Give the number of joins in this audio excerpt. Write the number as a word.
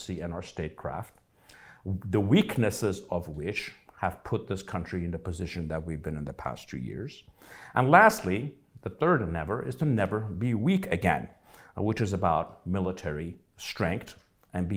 zero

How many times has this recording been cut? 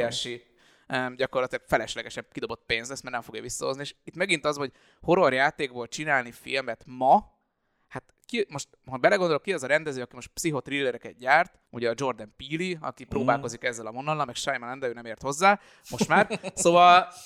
one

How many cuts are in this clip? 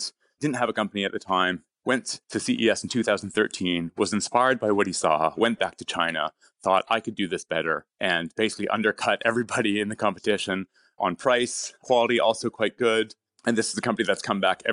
one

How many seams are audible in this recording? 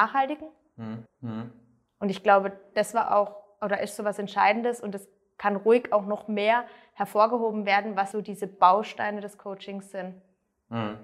two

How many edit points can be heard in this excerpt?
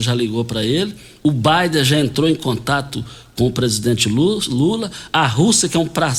zero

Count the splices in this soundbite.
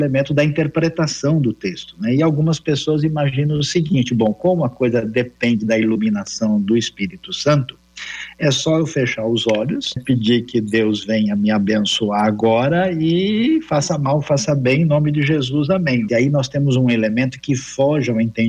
two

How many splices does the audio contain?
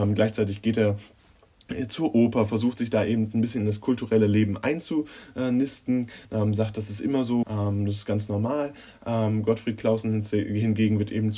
two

